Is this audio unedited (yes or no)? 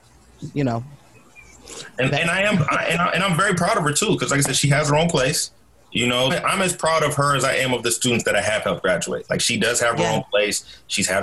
no